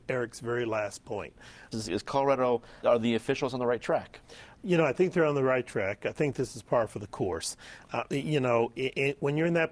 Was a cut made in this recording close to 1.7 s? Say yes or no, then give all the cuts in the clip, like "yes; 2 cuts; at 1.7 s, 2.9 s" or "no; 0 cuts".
yes; 2 cuts; at 1.7 s, 2.8 s